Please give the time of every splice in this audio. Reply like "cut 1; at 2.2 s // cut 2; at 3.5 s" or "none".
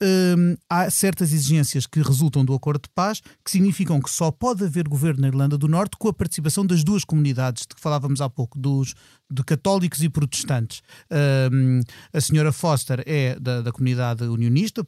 none